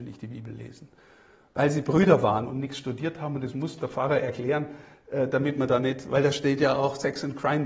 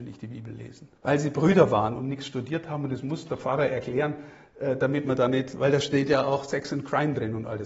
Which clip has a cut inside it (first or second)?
second